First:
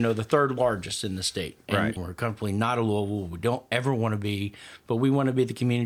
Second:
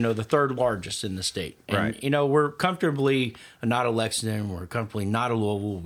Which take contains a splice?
first; 1 cut; at 2.0 s

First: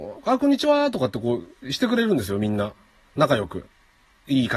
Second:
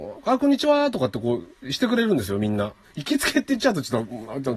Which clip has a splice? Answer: second; 1 cut; at 2.8 s

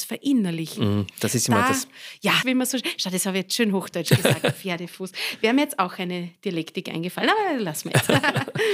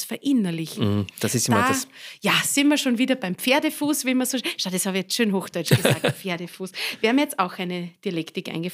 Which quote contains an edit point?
first; 1 cut; at 2.4 s

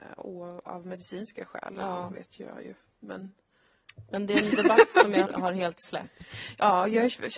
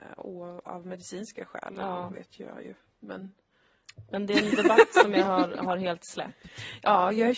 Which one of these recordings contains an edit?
first; 1 cut; at 5.2 s

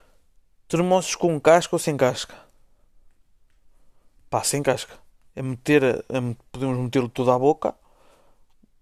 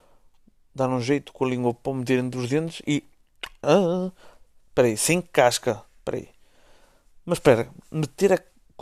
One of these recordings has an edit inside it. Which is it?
second; 1 cut; at 3.6 s

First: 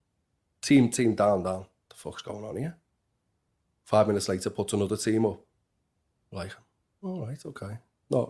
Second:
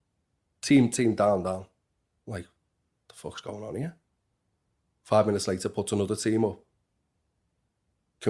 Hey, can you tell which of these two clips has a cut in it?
first; 2 cuts; at 1.9 s, 6.2 s

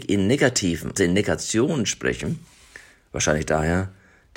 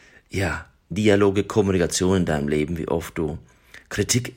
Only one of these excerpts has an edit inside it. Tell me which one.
first; 1 cut; at 1.0 s

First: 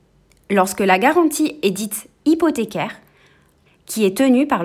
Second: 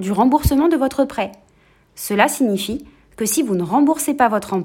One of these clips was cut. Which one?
first; 1 cut; at 3.7 s

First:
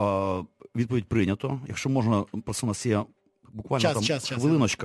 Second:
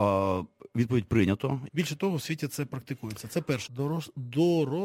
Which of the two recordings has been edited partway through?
second; 2 cuts; at 1.7 s, 3.7 s

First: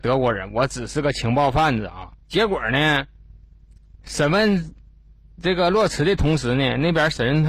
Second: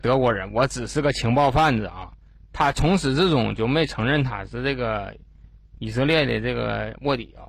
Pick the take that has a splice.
first; 1 cut; at 2.2 s

